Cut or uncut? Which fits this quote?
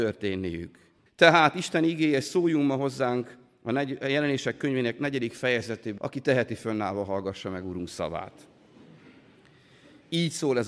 cut